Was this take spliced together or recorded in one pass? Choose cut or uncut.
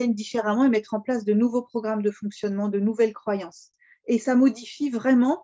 uncut